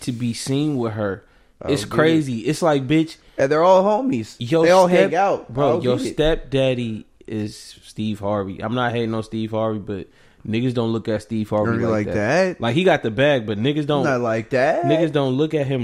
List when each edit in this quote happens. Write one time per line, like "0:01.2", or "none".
none